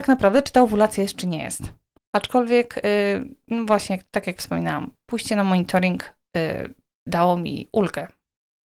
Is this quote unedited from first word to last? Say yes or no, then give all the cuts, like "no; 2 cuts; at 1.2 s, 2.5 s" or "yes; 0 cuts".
no; 1 cut; at 2.0 s